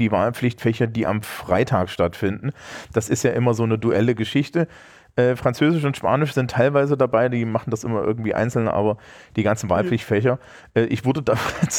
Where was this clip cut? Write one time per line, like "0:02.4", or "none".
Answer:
none

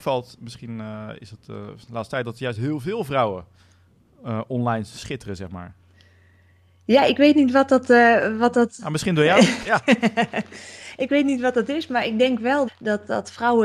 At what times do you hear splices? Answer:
0:09.6
0:12.7

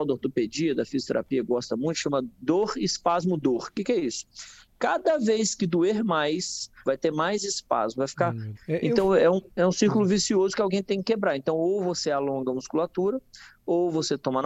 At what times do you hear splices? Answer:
0:06.8
0:08.6

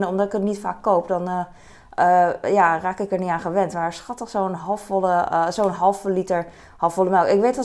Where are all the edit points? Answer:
none

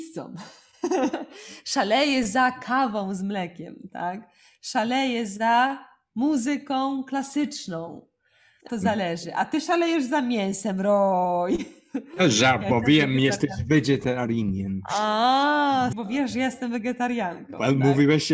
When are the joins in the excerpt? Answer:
0:08.7
0:15.9

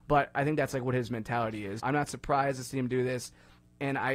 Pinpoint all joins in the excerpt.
0:01.8

